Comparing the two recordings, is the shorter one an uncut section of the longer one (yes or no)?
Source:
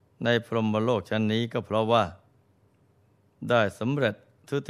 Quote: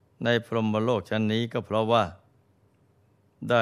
yes